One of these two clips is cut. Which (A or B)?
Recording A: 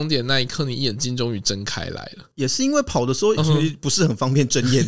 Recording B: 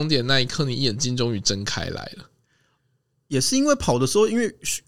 A